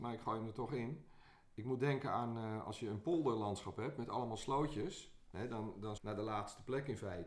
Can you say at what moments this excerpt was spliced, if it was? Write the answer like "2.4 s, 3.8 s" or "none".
6.0 s